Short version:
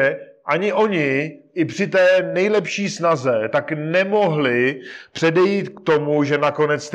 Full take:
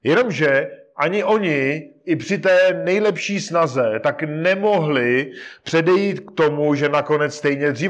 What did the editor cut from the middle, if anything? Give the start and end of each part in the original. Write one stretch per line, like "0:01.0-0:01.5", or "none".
none